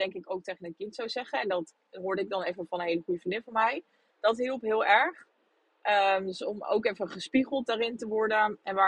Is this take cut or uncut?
uncut